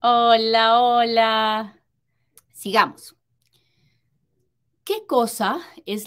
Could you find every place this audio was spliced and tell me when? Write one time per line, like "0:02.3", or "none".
0:02.4